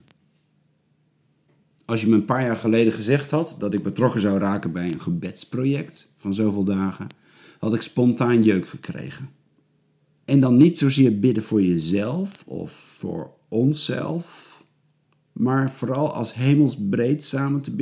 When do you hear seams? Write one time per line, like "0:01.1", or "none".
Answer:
0:10.2